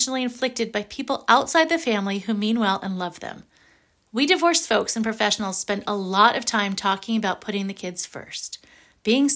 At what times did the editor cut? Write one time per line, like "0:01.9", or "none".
none